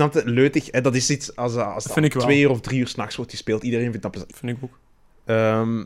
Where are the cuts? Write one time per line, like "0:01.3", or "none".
0:04.3

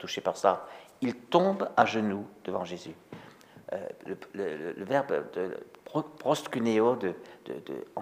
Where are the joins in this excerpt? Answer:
none

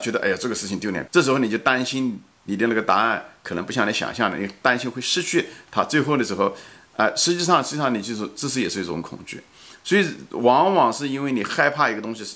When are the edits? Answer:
0:01.1

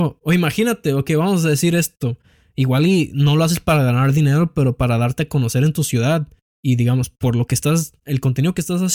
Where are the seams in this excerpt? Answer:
none

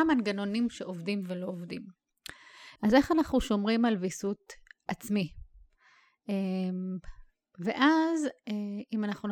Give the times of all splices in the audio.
0:02.8

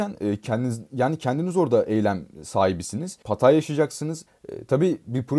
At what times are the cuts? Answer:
0:03.2
0:04.3

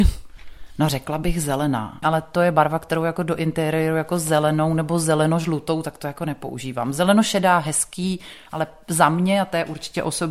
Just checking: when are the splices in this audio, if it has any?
0:02.0

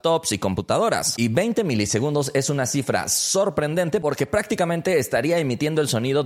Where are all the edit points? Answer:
0:01.2

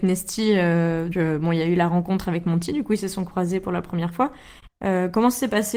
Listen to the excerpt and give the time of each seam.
0:01.1
0:04.7

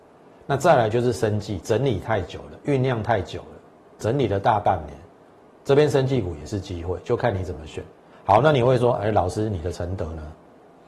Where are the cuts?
0:08.1

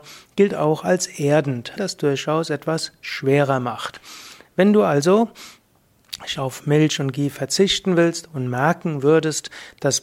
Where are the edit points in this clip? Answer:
0:01.8
0:06.4

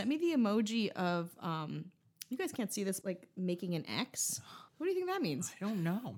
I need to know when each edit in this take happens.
0:03.0
0:04.7

